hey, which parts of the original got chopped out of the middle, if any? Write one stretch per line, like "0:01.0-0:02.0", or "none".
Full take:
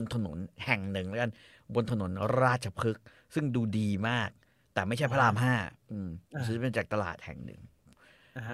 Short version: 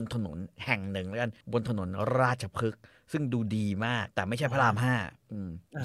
0:01.4-0:01.6
0:04.3-0:04.7